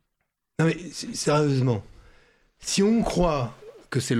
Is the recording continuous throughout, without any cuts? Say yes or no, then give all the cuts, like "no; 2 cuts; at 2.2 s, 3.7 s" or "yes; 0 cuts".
yes; 0 cuts